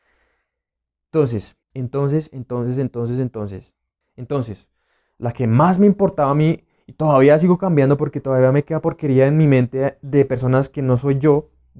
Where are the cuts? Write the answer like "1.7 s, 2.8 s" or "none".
1.6 s, 4.0 s